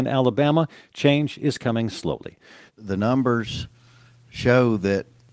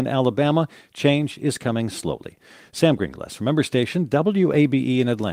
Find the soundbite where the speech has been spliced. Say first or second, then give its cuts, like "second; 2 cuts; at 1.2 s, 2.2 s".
first; 1 cut; at 2.7 s